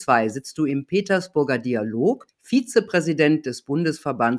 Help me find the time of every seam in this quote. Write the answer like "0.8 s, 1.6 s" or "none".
2.3 s